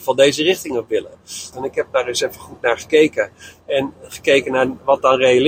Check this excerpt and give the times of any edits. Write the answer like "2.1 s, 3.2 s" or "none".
1.5 s